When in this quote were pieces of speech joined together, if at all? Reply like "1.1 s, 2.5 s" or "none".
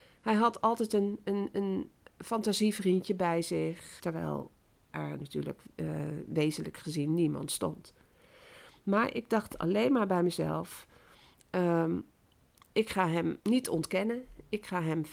4.0 s, 13.4 s

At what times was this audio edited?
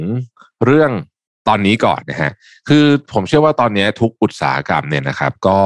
2.0 s

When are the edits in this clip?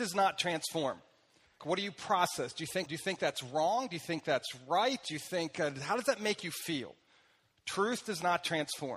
1.6 s, 2.9 s

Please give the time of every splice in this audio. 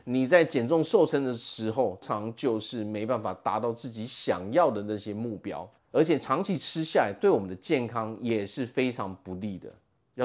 2.0 s, 5.8 s

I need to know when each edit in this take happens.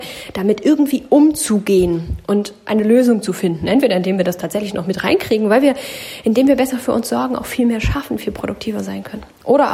none

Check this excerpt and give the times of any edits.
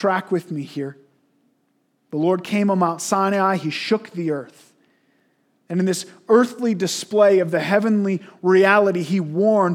none

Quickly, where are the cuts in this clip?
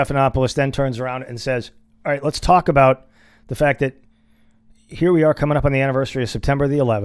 none

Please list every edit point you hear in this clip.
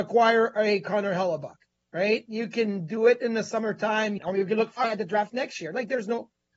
4.2 s

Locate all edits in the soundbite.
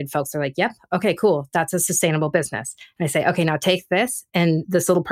none

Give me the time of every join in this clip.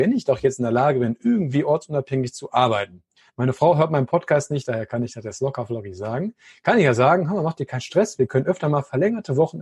none

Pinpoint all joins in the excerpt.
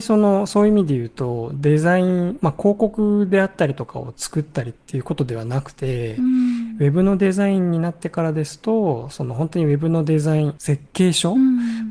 none

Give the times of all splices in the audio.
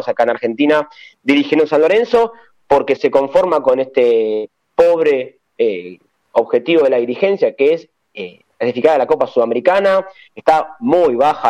3.0 s

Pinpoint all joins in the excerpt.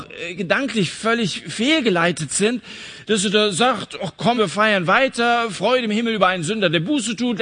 4.4 s

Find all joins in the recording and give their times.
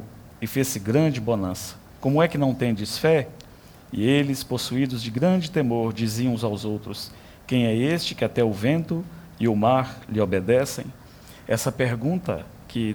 2.0 s

